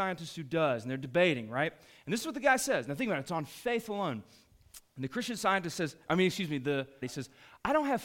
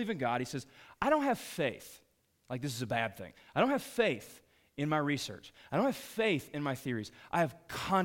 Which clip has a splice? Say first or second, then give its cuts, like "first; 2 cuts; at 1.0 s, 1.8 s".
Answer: first; 1 cut; at 7.0 s